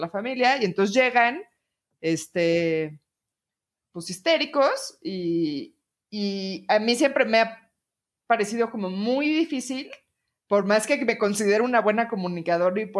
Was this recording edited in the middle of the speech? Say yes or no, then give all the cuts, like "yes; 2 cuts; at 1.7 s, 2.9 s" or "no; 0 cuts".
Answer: no; 0 cuts